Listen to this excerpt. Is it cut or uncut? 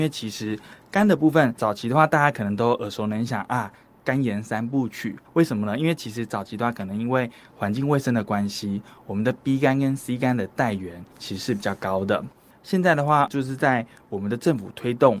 cut